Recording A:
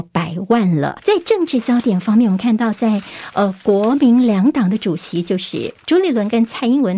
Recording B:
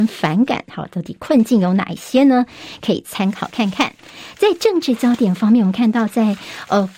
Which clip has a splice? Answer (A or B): A